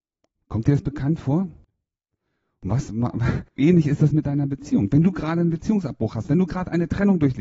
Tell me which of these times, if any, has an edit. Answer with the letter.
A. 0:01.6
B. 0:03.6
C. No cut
B